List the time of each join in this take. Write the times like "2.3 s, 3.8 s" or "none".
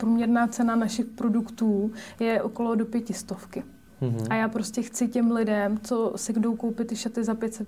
none